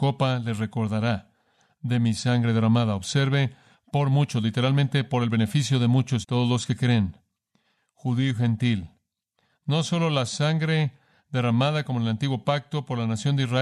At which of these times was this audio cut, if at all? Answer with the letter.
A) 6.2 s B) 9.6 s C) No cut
A